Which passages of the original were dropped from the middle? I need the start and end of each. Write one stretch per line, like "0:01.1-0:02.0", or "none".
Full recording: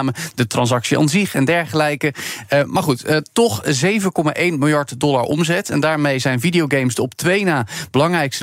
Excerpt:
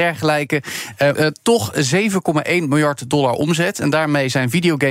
0:02.6-0:03.0